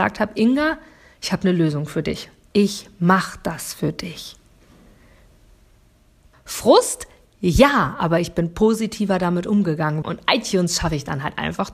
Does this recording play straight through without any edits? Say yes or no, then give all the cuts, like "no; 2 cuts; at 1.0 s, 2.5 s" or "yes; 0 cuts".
no; 2 cuts; at 6.3 s, 10.0 s